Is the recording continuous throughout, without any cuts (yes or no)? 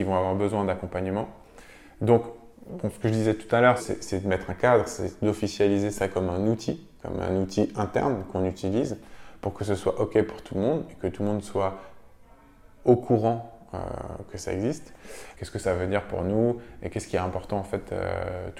no